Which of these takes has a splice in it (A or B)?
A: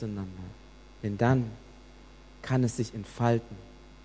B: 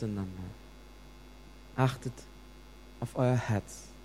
A